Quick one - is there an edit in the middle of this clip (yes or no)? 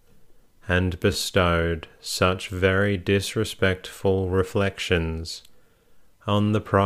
no